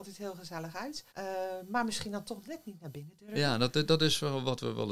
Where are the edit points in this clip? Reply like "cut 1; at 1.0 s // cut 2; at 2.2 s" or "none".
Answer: cut 1; at 1.1 s